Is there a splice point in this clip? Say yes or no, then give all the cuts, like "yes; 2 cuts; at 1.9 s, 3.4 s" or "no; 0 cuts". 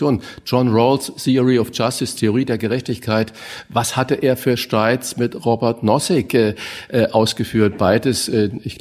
no; 0 cuts